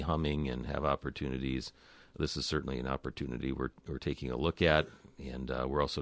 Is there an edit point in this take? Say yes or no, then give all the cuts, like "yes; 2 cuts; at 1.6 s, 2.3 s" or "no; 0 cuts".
no; 0 cuts